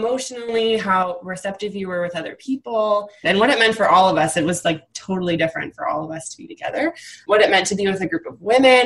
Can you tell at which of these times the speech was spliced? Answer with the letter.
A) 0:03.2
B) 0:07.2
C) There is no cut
A